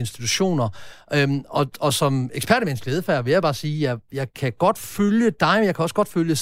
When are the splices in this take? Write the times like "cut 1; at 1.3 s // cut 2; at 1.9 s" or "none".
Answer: none